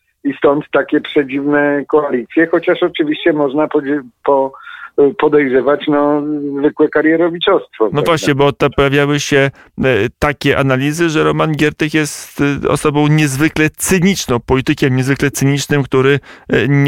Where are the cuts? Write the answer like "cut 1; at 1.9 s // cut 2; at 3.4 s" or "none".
none

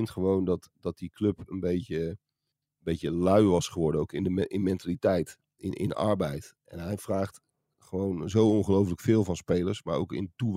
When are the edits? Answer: none

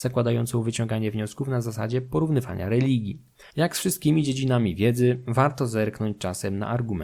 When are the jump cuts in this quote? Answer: cut 1; at 3.5 s

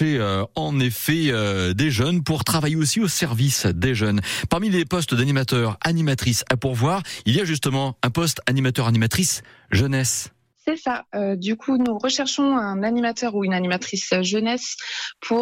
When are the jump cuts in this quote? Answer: none

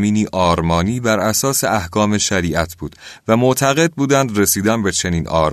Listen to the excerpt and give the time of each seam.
none

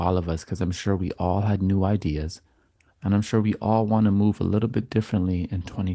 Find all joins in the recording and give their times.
cut 1; at 2.9 s

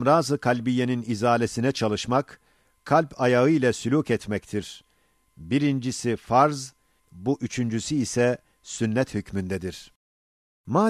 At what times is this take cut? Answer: cut 1; at 7.0 s

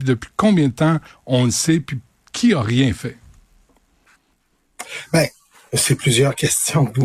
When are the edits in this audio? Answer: none

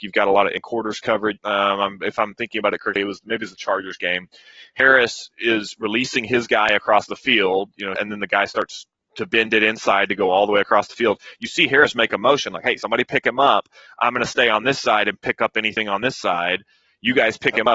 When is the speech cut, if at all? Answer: cut 1; at 1.4 s // cut 2; at 8.0 s

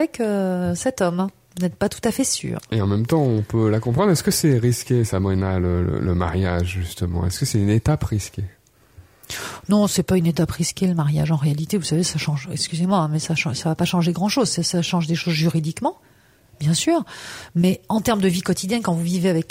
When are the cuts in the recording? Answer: none

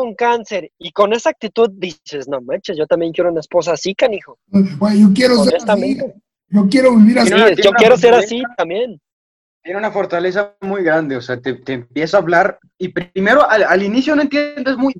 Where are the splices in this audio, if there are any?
none

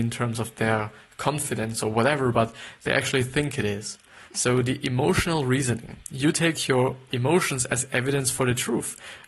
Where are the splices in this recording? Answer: cut 1; at 4.3 s // cut 2; at 7.1 s

